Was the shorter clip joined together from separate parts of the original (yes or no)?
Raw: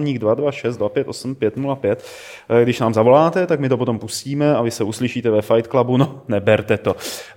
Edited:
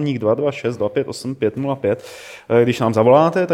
no